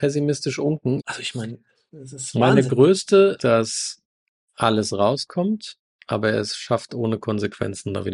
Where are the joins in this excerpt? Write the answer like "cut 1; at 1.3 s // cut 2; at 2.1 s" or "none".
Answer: cut 1; at 1.0 s // cut 2; at 3.4 s